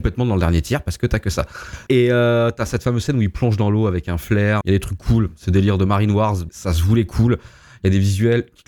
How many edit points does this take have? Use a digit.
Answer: 3